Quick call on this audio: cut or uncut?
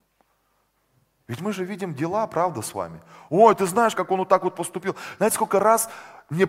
cut